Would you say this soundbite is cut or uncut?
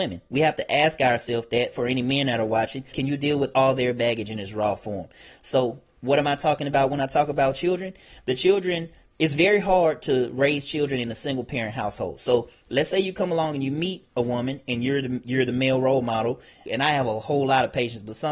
cut